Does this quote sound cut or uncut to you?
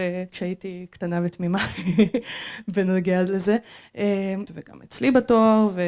cut